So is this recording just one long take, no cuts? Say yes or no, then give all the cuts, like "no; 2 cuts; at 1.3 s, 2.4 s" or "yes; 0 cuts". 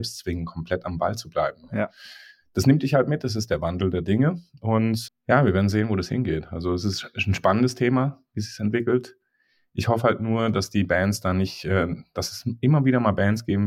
no; 1 cut; at 5.1 s